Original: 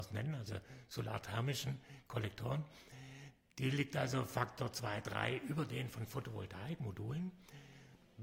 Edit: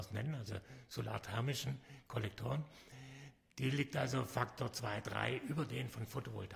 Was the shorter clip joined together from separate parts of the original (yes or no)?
no